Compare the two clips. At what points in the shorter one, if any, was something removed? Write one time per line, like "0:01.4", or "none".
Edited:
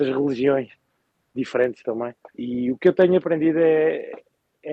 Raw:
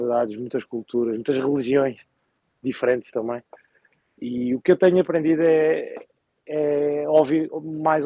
0:02.3